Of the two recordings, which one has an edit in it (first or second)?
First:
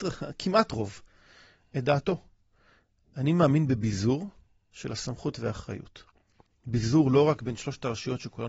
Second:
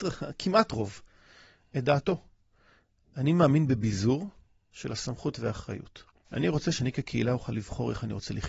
second